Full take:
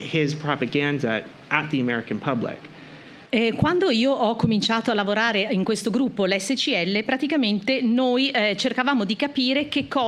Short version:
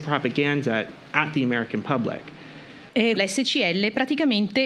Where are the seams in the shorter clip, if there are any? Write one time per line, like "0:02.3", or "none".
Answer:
0:03.2